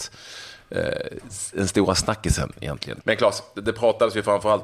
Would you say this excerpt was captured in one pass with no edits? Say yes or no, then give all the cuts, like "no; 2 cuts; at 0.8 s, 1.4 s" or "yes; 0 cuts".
no; 1 cut; at 3.0 s